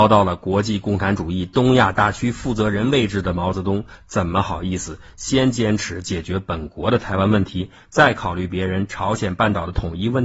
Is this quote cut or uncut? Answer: uncut